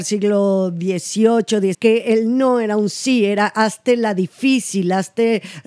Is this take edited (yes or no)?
yes